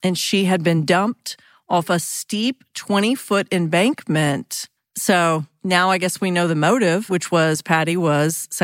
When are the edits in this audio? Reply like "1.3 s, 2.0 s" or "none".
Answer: 4.8 s, 7.1 s